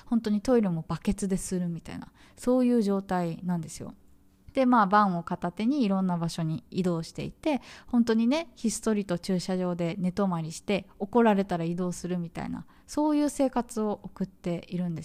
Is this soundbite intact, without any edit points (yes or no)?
no